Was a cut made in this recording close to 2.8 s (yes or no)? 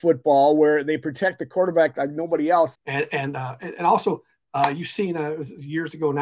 yes